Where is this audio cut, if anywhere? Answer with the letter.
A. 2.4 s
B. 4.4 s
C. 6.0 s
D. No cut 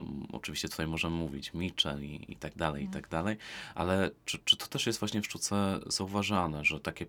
B